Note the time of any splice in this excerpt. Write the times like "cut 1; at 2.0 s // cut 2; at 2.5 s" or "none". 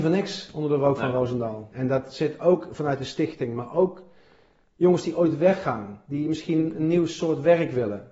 cut 1; at 1.7 s